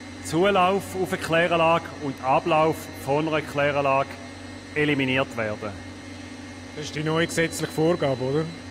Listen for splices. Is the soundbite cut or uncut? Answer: uncut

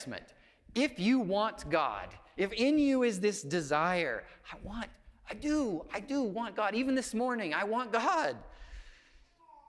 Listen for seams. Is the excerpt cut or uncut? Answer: uncut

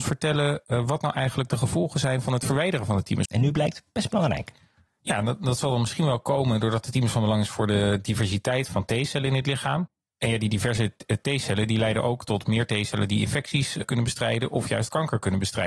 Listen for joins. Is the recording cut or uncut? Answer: cut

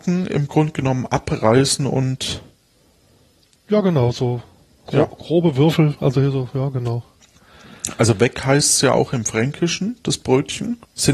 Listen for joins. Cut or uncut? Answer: uncut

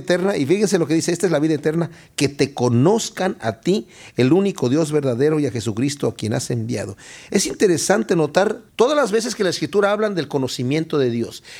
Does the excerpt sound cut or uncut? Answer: uncut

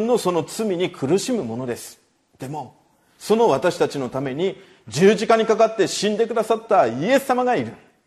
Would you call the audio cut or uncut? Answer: uncut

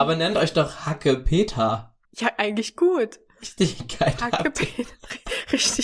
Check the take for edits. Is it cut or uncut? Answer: cut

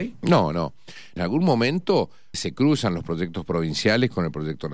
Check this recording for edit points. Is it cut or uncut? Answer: cut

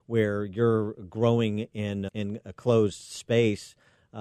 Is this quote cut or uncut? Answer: cut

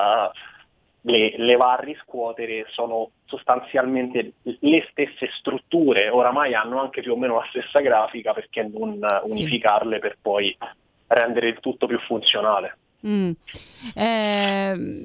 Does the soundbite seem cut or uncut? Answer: uncut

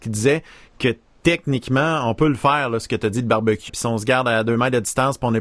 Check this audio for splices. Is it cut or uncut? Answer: cut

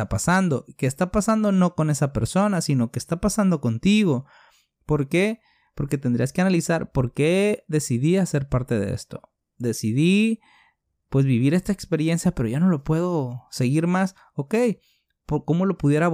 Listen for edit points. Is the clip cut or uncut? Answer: uncut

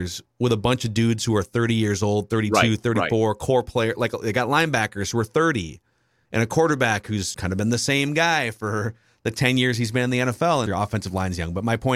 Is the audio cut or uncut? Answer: cut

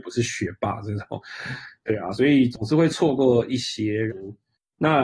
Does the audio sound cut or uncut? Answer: cut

